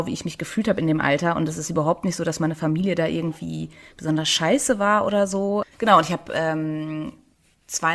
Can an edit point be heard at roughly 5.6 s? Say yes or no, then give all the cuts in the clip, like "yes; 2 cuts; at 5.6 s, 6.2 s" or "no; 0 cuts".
yes; 1 cut; at 5.6 s